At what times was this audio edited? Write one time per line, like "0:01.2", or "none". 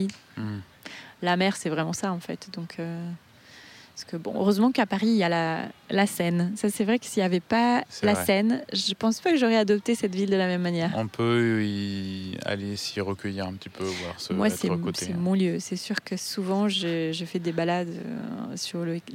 none